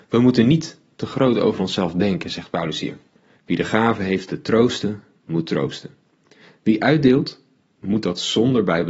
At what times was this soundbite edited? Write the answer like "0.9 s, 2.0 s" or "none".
3.4 s